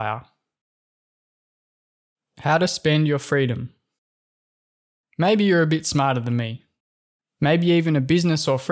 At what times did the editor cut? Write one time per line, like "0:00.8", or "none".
0:07.2